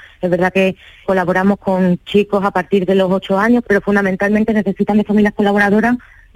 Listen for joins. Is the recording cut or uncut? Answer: cut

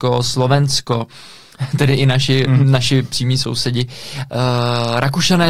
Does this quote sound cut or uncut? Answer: uncut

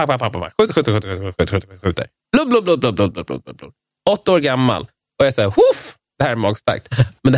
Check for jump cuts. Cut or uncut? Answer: uncut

